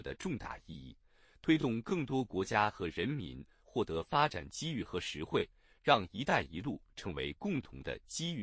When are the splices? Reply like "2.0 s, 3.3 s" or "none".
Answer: none